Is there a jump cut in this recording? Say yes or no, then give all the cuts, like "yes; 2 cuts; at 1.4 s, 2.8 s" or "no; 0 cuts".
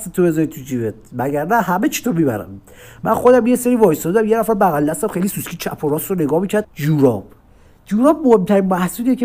yes; 1 cut; at 6.6 s